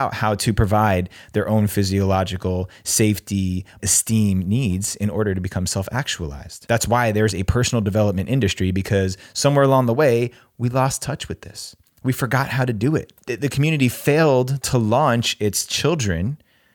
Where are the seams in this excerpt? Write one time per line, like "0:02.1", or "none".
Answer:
0:03.8